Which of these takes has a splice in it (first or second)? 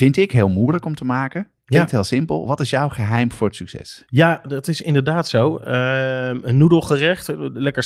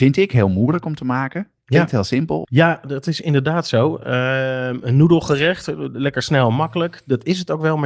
second